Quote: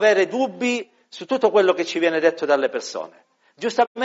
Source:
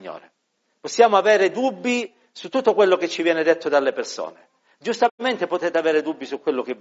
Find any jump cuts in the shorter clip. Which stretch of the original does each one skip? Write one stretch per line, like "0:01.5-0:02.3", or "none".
none